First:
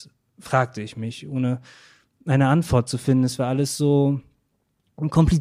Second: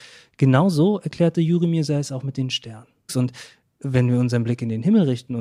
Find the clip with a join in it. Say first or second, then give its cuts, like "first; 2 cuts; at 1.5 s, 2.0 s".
second; 1 cut; at 3.1 s